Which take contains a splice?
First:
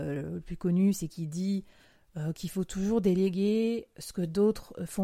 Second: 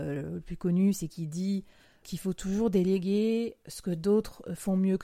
second; 1 cut; at 2.0 s

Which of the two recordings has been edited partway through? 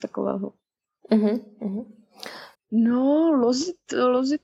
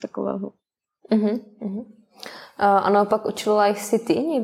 first; 1 cut; at 2.5 s

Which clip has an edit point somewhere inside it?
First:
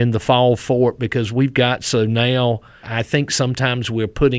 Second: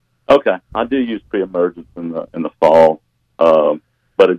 first; 1 cut; at 2.8 s

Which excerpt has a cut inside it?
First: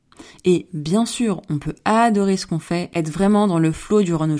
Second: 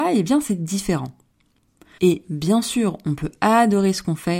second; 1 cut; at 2.0 s

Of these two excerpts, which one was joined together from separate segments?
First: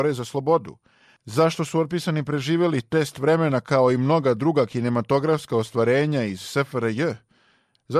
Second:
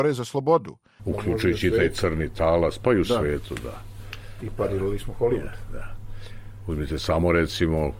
second; 1 cut; at 1.0 s

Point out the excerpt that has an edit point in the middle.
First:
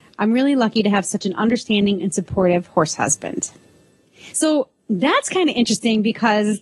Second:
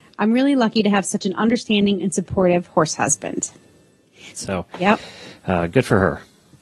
second; 1 cut; at 4.3 s

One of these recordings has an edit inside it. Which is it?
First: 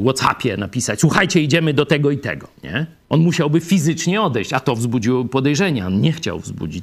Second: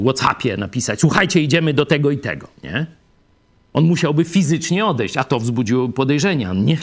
first; 1 cut; at 3.0 s

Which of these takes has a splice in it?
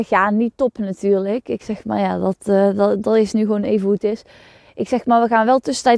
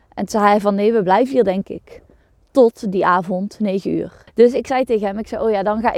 second; 1 cut; at 4.3 s

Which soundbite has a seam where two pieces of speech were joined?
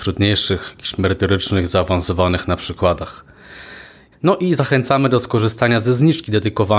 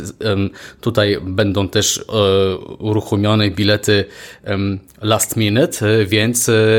first; 1 cut; at 4.1 s

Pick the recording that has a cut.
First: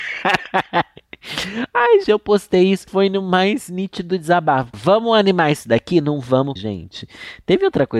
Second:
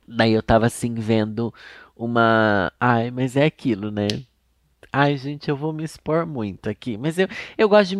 first; 3 cuts; at 2.0 s, 4.7 s, 6.6 s

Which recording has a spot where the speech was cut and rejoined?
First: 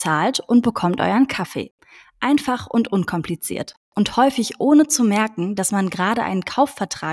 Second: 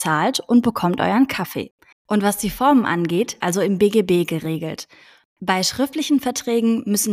second; 3 cuts; at 1.9 s, 3.4 s, 5.2 s

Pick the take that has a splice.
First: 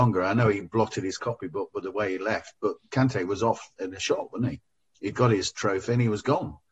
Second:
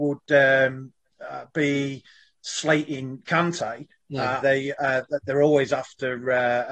second; 1 cut; at 4.4 s

